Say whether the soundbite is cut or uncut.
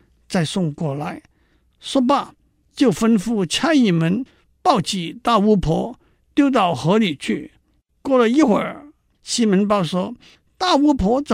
uncut